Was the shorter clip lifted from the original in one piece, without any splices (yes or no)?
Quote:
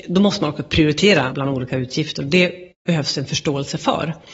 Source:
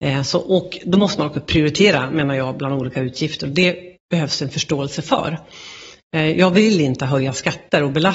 no